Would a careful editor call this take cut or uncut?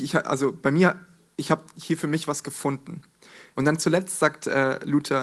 cut